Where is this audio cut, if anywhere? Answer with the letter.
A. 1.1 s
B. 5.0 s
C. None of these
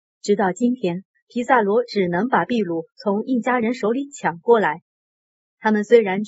A